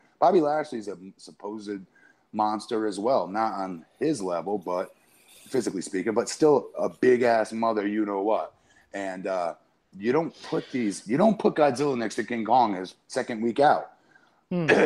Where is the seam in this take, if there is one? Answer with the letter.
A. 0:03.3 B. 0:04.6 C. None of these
C